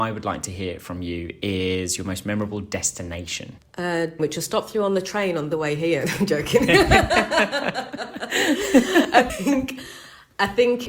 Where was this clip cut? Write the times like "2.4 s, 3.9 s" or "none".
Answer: 4.2 s